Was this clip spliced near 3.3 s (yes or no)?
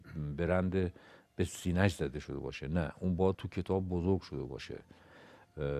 yes